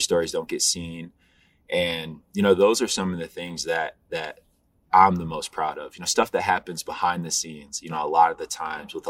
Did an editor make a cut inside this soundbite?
no; 0 cuts

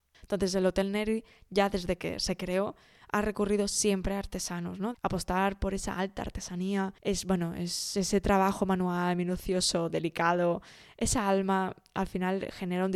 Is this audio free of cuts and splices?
no; 2 cuts; at 4.9 s, 7.0 s

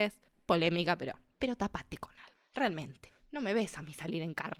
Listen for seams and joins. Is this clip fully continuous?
yes; 0 cuts

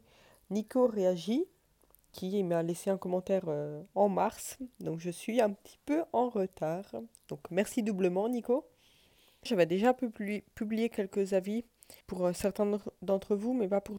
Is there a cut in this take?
yes; 2 cuts; at 9.5 s, 12.0 s

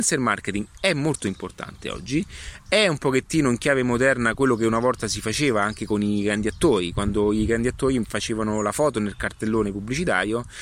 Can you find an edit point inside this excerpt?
no; 0 cuts

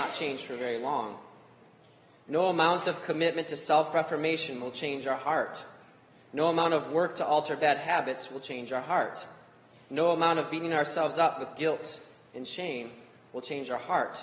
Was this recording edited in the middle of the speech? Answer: no; 0 cuts

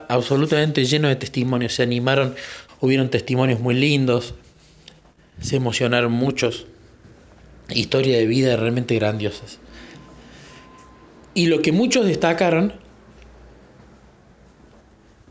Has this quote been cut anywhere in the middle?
yes; 1 cut; at 2.7 s

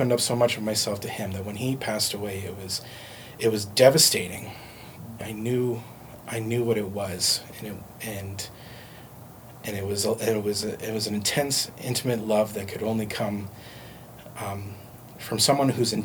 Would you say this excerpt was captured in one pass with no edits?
no; 1 cut; at 5.2 s

